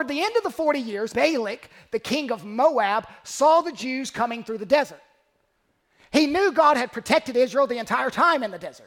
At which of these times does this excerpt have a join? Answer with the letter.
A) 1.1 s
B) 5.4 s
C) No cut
A